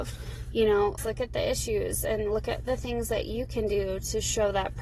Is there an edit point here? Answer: yes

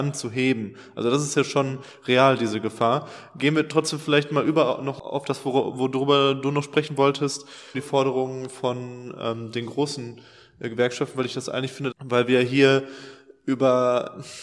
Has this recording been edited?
yes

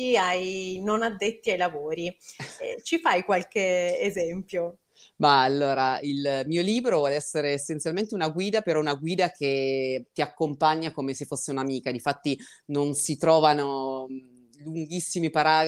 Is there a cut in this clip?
no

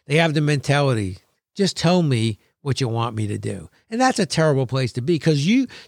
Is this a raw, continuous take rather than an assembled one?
yes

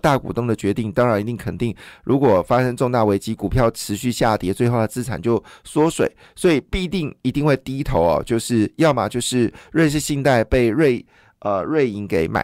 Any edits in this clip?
no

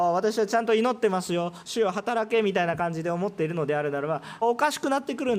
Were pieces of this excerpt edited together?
yes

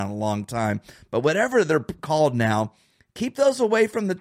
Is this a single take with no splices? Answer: yes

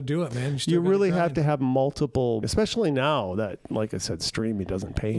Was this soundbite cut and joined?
yes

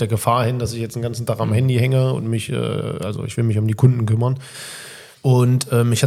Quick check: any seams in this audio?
yes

